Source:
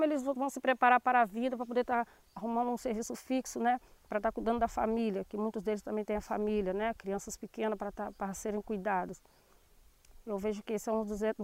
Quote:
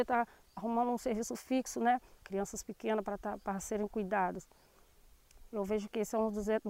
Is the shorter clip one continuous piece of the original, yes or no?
no